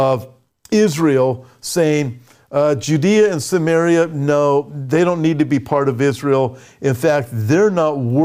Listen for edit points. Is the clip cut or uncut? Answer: uncut